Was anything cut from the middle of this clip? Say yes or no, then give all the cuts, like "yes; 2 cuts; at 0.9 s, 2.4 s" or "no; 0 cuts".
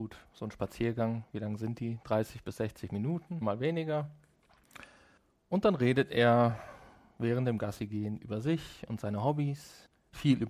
yes; 1 cut; at 3.4 s